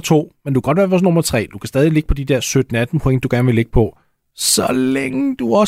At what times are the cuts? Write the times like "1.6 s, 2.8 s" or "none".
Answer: none